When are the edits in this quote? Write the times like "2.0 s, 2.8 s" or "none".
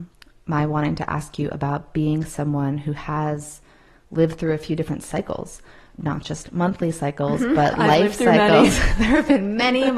5.9 s